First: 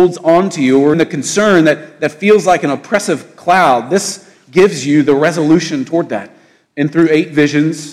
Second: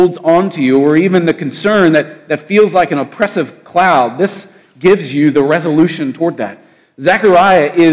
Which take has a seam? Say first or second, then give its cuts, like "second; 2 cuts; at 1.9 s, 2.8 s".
first; 2 cuts; at 0.9 s, 6.7 s